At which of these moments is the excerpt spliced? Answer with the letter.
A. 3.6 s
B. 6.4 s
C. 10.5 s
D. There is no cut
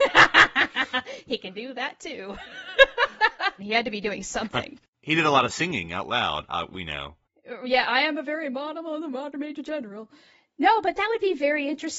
A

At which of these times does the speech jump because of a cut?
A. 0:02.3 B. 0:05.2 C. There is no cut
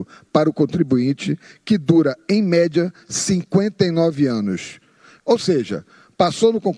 B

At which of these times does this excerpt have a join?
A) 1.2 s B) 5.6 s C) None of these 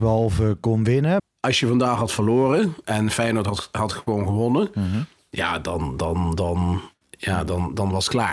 A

